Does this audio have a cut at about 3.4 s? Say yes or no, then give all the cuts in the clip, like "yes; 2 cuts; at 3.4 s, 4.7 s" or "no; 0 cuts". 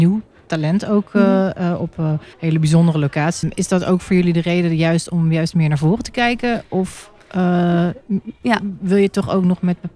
yes; 2 cuts; at 2.3 s, 3.4 s